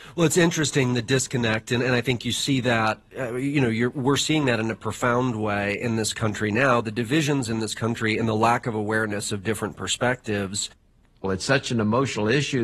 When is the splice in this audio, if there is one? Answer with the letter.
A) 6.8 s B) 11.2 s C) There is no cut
B